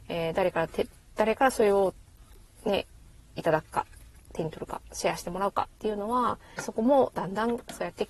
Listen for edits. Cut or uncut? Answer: cut